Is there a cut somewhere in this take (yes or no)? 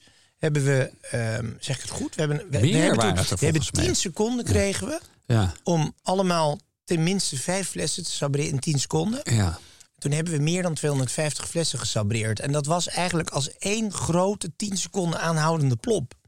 no